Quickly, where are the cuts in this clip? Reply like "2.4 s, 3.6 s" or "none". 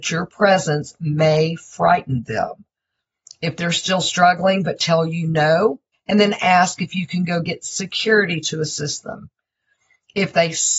3.2 s, 5.9 s